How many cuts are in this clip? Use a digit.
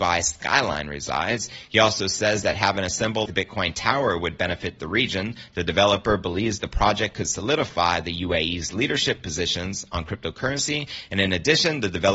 1